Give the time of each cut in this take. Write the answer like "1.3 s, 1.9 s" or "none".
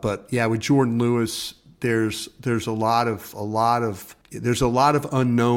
4.2 s